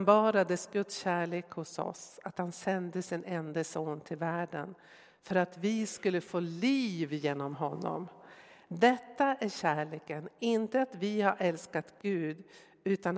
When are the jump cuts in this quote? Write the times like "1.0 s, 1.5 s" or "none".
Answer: none